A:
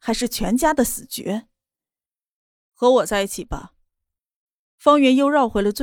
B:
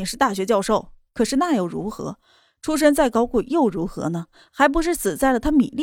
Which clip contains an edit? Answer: B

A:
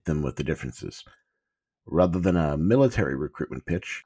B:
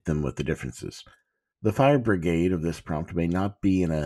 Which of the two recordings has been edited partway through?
B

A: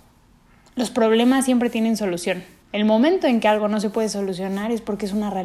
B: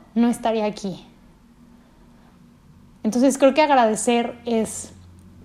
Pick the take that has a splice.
A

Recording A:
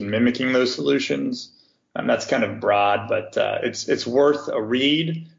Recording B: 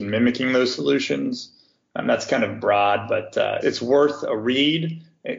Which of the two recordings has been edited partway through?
B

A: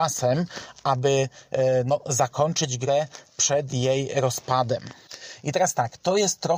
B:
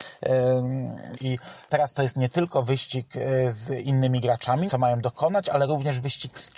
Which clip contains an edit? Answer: B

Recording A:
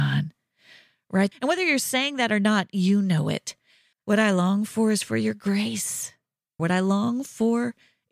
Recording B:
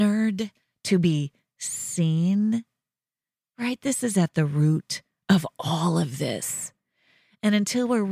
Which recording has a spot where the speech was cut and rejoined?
A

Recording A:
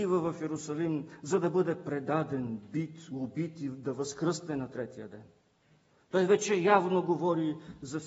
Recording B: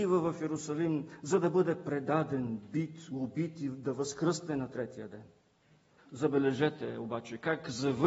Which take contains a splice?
B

